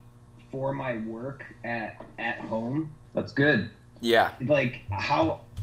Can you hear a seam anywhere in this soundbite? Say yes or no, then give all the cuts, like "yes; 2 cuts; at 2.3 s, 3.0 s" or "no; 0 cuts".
yes; 2 cuts; at 3.0 s, 4.4 s